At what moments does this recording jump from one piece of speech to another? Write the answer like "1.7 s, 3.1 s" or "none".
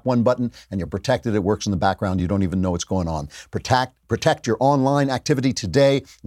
none